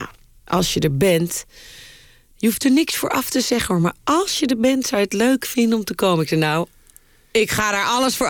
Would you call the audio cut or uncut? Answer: uncut